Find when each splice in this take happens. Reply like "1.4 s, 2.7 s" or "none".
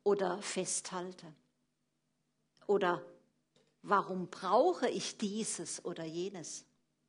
2.5 s